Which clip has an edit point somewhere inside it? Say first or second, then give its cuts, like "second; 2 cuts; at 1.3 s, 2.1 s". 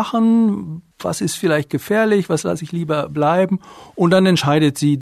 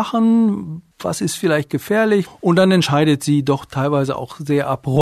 second; 1 cut; at 2.3 s